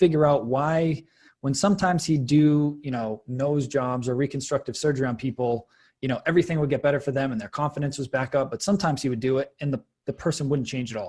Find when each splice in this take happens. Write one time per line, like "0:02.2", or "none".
none